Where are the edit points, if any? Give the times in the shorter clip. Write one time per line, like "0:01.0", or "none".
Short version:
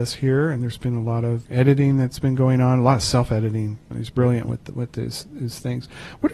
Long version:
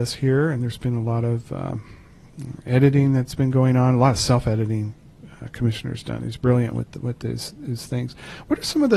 0:01.4
0:03.9